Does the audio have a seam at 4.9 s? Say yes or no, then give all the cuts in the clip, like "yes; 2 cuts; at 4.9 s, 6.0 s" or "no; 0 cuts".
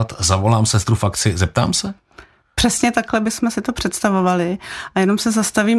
no; 0 cuts